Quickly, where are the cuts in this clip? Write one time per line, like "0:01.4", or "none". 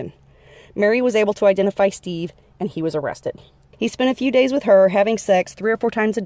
0:03.7